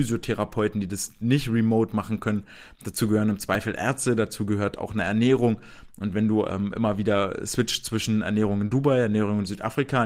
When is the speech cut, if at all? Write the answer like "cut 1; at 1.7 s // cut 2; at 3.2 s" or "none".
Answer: none